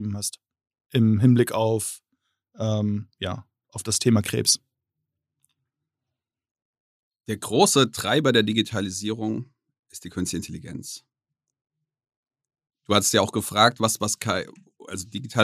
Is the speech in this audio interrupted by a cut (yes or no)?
no